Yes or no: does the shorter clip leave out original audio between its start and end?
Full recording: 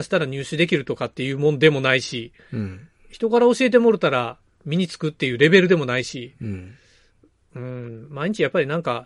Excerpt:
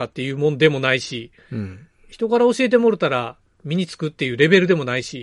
no